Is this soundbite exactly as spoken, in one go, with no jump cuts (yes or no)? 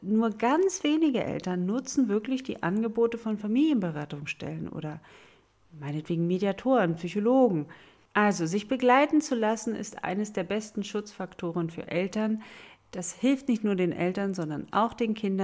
no